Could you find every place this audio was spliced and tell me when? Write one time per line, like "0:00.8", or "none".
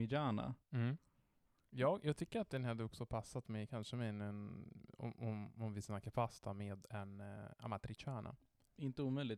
none